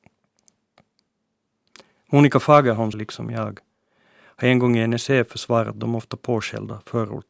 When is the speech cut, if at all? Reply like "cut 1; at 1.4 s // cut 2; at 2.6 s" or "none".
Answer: cut 1; at 2.9 s